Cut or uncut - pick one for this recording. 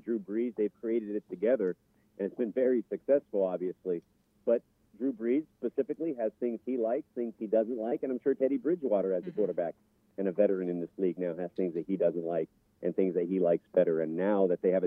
uncut